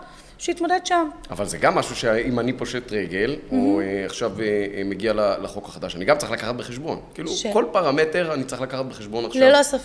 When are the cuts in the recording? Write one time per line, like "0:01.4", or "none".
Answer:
none